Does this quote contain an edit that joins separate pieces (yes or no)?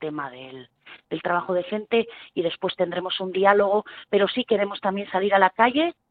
no